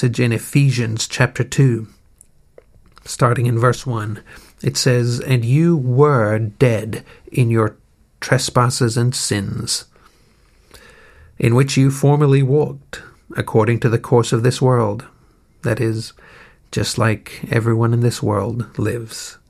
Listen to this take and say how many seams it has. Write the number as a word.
zero